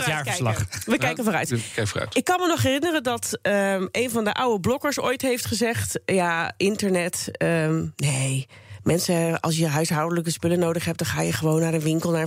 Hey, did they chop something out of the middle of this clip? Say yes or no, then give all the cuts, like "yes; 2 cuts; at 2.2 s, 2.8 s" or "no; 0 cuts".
no; 0 cuts